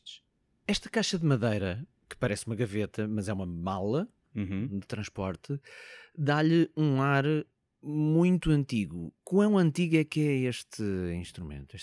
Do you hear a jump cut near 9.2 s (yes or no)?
yes